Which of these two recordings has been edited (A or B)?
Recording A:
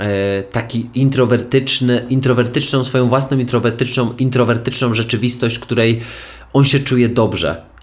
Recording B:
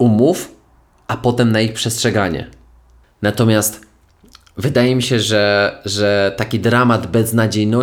B